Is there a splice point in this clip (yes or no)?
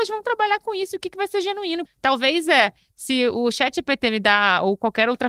yes